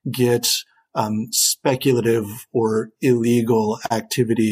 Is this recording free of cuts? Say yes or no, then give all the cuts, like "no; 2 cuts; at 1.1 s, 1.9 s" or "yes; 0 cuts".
yes; 0 cuts